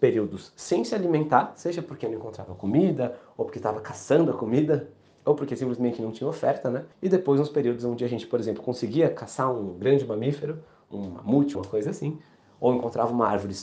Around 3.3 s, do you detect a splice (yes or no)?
no